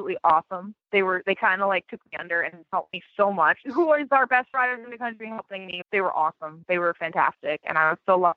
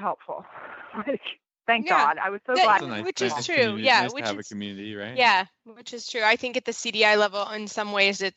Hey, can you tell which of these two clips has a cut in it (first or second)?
first